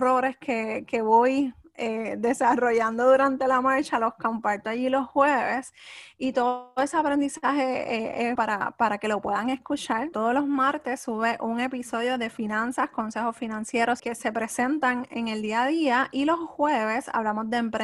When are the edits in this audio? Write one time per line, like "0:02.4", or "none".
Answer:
0:08.4
0:10.1
0:14.0